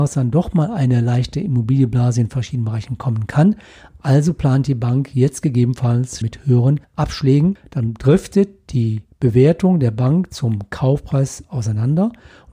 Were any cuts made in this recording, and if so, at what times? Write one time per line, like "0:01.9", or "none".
0:06.2